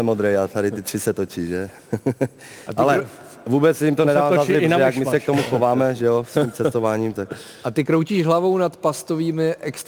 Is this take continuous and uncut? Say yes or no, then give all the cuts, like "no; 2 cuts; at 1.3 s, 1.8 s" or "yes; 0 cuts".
yes; 0 cuts